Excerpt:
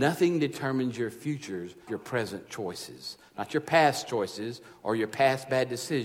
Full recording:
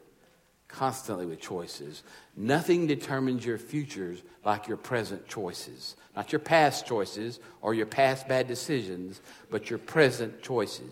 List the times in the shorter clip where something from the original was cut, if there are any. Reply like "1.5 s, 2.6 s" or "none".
1.9 s